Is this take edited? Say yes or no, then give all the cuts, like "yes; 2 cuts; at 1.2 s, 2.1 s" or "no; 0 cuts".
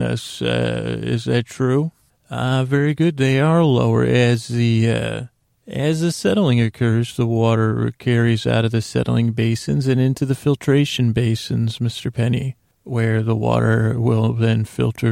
no; 0 cuts